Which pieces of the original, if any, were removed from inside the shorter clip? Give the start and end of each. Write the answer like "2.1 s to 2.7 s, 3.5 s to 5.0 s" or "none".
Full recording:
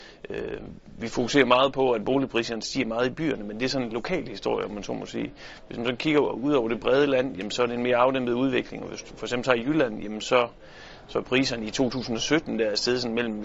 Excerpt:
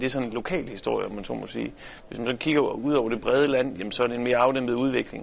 none